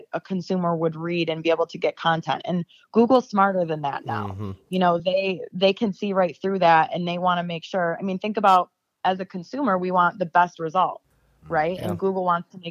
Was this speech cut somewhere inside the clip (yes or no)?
no